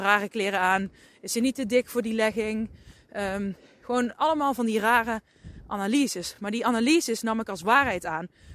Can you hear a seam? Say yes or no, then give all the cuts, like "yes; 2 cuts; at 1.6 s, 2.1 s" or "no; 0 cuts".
no; 0 cuts